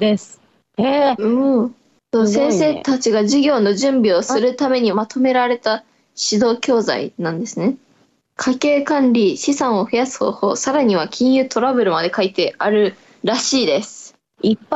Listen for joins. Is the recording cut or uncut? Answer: cut